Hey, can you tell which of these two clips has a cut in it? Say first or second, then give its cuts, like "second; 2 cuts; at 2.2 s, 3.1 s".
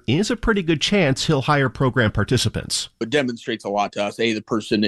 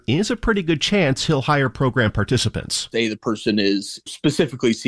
second; 1 cut; at 2.9 s